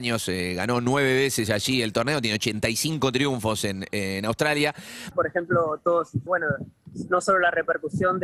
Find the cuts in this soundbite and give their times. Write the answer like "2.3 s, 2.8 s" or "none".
5.1 s, 6.3 s